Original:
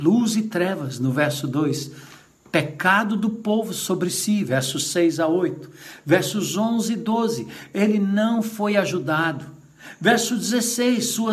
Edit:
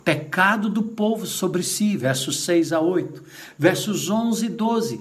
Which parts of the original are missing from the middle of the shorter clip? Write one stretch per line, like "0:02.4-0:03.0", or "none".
none